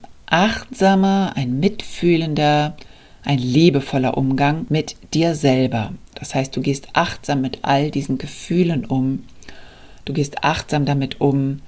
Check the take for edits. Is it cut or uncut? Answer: cut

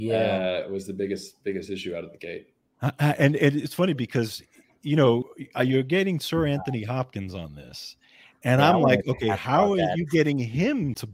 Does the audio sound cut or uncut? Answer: uncut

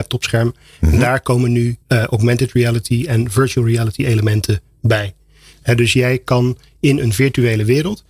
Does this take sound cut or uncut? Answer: cut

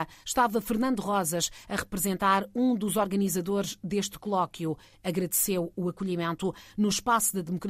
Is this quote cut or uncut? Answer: uncut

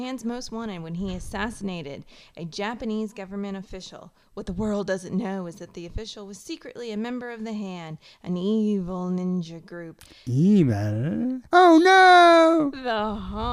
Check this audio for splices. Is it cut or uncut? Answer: cut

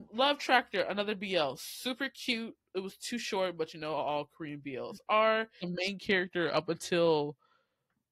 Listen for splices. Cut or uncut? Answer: cut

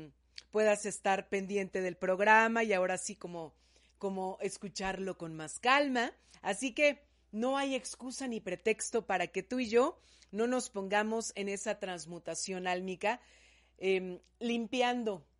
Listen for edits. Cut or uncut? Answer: cut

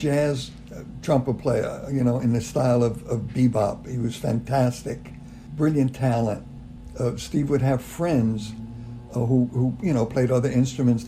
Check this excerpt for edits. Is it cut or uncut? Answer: uncut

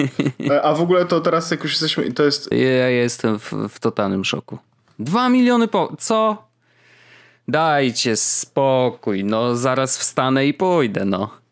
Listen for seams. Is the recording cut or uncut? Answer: cut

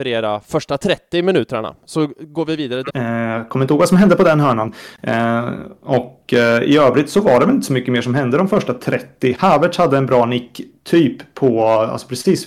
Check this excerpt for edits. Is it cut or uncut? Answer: cut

